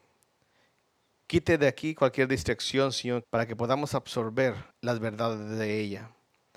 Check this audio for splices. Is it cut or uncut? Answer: cut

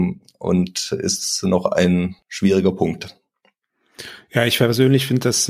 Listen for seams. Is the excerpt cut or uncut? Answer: cut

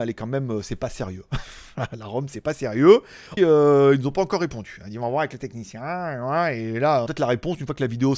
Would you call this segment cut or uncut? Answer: cut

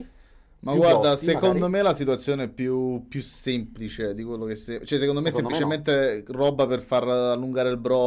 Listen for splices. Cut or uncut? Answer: uncut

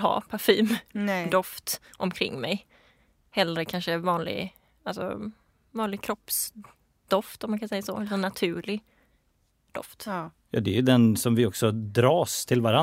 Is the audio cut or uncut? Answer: uncut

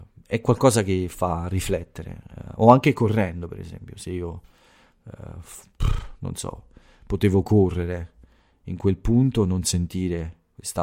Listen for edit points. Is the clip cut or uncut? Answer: uncut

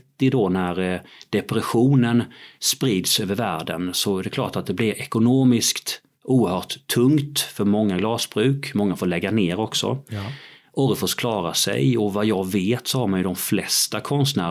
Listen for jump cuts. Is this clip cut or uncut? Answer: uncut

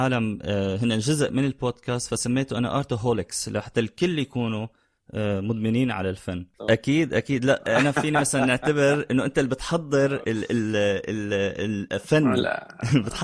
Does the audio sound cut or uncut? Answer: cut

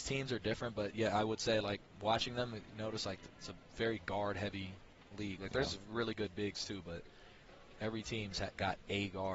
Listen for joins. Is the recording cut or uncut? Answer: uncut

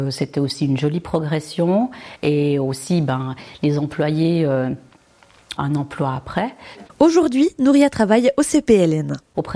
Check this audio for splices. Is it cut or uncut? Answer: cut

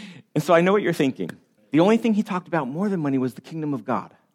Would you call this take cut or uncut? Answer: cut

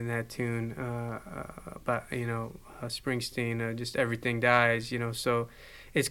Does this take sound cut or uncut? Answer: uncut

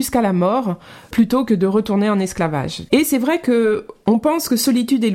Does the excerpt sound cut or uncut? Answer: cut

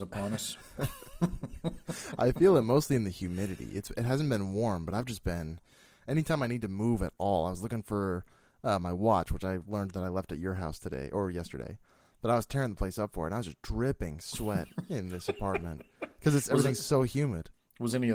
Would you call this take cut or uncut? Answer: uncut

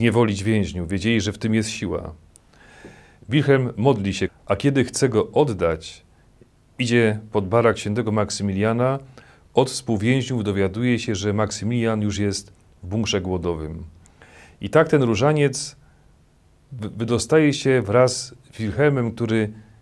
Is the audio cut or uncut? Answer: cut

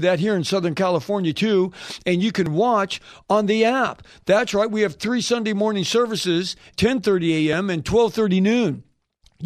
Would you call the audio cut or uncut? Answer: cut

